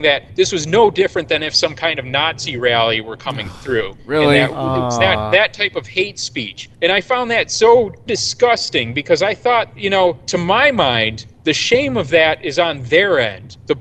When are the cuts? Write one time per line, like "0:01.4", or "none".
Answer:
0:08.1